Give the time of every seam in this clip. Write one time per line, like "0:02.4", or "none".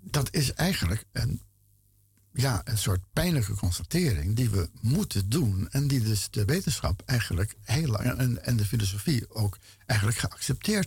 none